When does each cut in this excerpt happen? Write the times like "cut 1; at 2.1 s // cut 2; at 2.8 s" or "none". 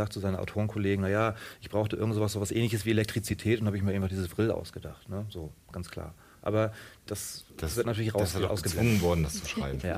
none

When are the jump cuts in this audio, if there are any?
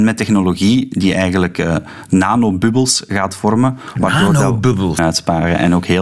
cut 1; at 5.0 s

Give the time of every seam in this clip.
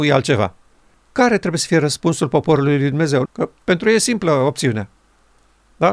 cut 1; at 0.9 s // cut 2; at 3.3 s

